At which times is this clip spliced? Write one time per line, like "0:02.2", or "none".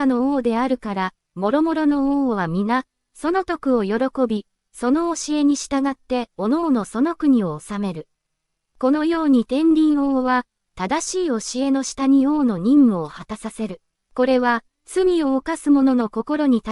0:10.7
0:13.9